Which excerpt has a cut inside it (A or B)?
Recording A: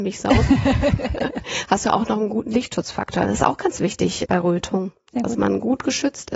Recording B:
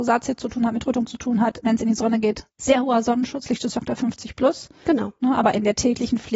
B